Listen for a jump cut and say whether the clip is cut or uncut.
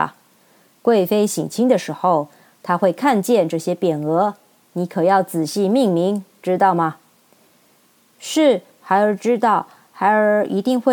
uncut